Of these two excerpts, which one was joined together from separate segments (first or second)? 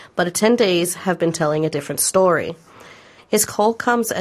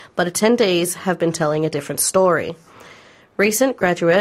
first